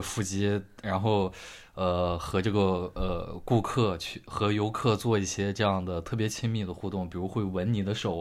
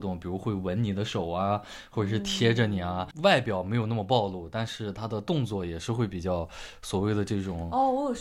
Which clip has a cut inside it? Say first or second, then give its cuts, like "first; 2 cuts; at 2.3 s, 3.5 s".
second; 1 cut; at 3.1 s